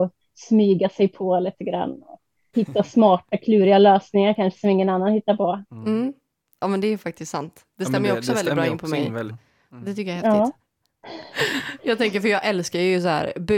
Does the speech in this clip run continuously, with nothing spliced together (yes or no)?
no